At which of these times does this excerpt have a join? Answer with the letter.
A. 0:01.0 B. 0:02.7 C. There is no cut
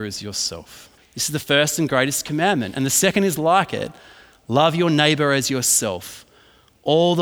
A